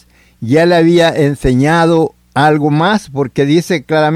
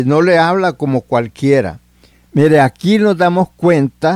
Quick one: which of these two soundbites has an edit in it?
second; 1 cut; at 2.1 s

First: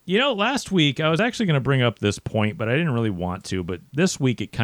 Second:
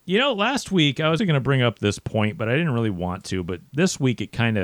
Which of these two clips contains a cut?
second; 1 cut; at 1.2 s

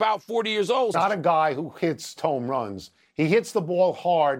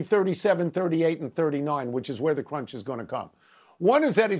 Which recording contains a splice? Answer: first; 2 cuts; at 0.9 s, 2.2 s

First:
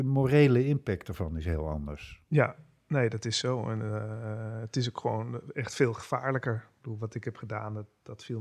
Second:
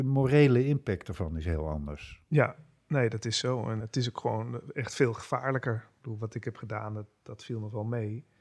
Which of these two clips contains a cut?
second; 1 cut; at 3.8 s

